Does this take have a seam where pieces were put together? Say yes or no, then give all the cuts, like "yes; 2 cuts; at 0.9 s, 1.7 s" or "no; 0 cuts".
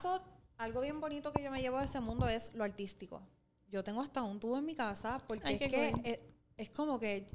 yes; 1 cut; at 3.6 s